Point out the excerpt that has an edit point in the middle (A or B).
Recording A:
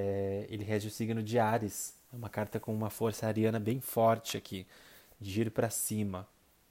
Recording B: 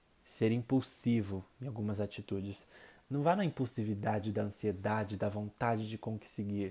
B